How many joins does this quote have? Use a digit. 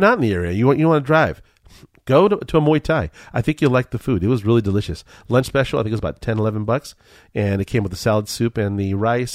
0